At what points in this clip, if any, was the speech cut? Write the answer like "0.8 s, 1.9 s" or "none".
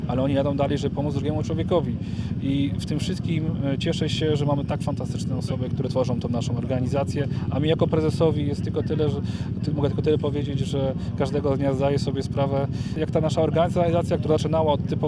5.7 s